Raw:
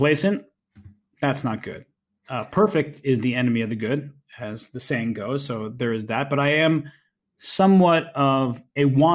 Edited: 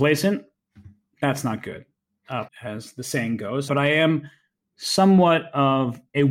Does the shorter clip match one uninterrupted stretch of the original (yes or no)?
no